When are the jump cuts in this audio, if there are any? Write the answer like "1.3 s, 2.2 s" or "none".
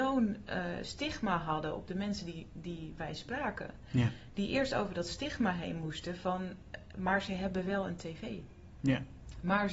none